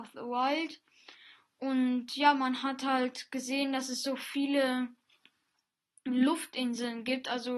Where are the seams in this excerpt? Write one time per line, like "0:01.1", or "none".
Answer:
none